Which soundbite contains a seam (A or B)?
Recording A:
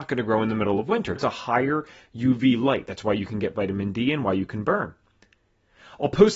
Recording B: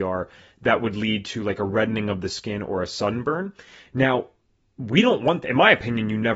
A